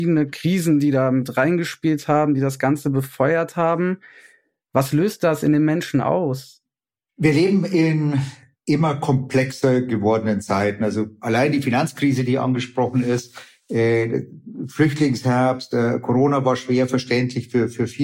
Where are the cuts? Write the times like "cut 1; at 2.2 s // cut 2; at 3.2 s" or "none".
none